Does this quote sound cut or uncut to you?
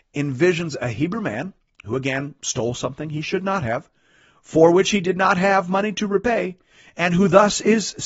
uncut